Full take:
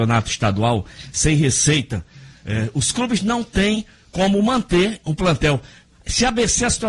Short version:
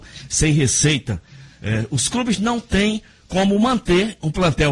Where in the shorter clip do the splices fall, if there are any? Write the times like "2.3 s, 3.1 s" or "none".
none